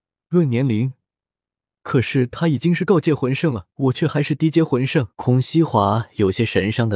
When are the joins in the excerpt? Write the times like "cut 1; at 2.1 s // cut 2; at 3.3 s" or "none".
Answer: cut 1; at 1.7 s // cut 2; at 3.7 s // cut 3; at 5.1 s